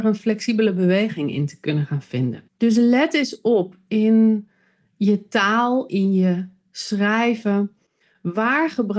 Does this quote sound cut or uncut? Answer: cut